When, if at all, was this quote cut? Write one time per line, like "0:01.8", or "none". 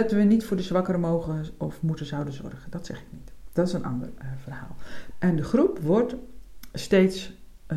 0:05.1